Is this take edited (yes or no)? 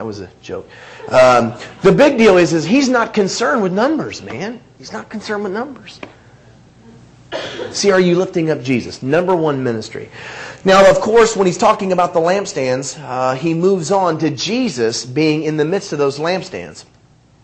no